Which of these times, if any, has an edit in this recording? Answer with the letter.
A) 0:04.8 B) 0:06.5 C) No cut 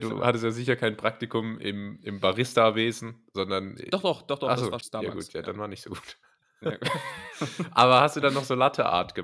A